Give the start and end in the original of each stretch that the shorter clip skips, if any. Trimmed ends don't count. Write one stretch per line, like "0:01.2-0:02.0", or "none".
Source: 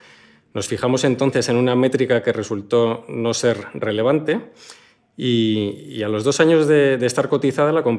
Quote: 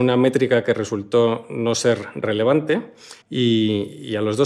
0:04.8-0:05.1

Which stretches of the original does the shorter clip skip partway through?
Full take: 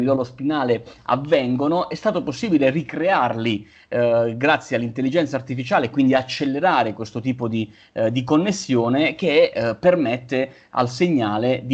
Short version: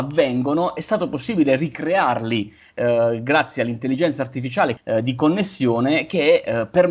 0:05.9-0:07.9

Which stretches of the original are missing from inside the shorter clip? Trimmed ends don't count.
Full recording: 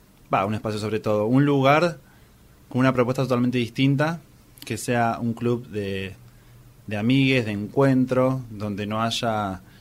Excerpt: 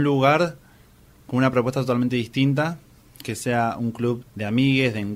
0:05.6-0:06.7

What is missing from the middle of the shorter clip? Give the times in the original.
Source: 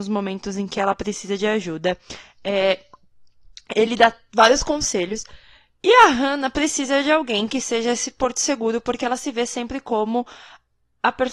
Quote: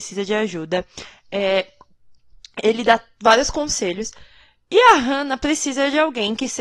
none

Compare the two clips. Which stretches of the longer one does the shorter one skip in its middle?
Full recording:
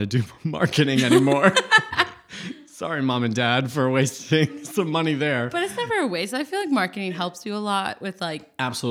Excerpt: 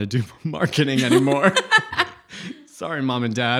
none

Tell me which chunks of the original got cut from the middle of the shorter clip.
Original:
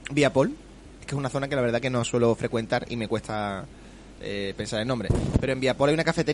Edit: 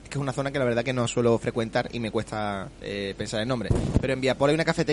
0:03.7-0:04.1

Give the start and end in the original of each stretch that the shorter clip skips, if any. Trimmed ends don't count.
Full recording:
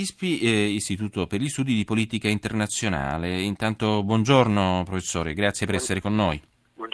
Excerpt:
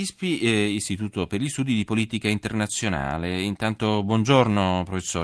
none

